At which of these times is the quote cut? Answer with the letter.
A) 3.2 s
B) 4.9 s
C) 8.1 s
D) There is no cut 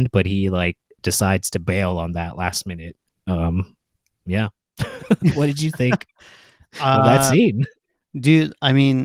D